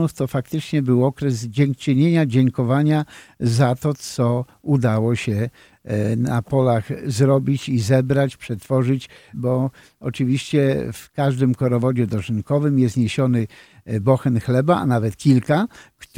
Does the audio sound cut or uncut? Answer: cut